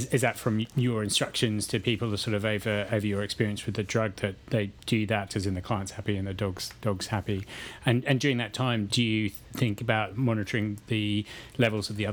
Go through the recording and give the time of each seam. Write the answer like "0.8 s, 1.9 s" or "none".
5.3 s, 8.9 s, 10.1 s